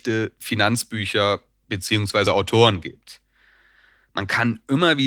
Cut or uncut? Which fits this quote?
uncut